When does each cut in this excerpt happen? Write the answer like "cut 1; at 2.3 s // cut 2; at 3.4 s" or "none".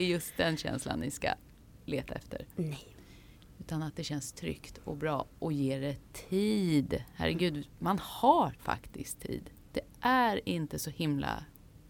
cut 1; at 9.6 s